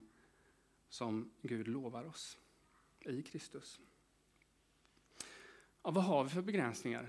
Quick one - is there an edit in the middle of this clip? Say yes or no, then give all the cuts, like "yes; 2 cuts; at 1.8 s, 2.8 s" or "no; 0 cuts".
no; 0 cuts